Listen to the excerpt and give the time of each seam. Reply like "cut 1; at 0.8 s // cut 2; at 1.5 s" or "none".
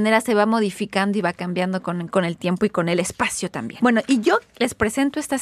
cut 1; at 3.8 s